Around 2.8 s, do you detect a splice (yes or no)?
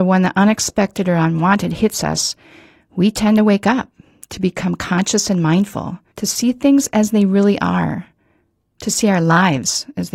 no